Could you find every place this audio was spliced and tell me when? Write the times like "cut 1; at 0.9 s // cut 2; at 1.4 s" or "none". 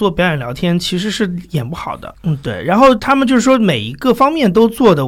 cut 1; at 2.1 s